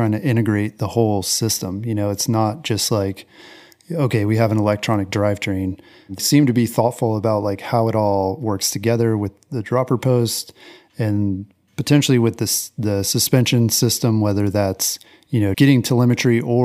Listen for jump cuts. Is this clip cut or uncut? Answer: cut